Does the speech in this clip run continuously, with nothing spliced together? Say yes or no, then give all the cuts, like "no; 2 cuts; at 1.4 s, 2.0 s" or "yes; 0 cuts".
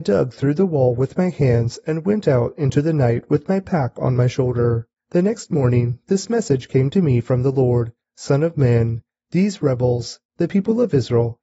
yes; 0 cuts